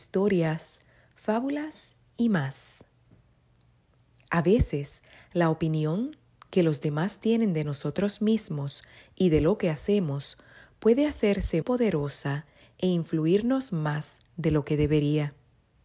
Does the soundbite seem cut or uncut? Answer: cut